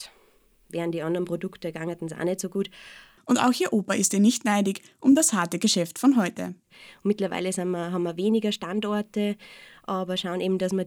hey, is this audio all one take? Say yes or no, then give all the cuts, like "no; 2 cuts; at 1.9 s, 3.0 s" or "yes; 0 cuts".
no; 1 cut; at 3.2 s